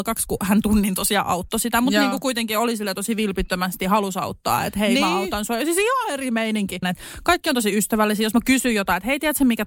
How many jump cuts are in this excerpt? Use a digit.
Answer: 1